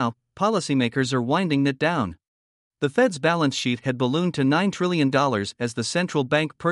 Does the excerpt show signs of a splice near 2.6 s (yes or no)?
yes